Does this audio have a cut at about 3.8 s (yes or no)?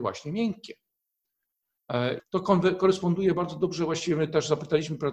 no